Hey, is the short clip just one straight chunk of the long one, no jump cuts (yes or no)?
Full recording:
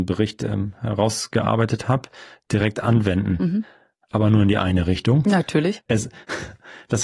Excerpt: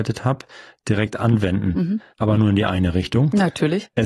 no